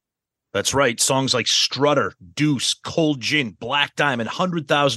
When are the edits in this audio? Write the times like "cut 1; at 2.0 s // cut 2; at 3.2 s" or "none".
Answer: none